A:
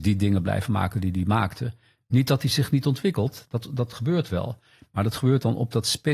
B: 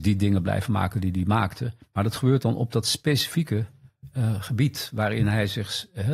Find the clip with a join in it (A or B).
B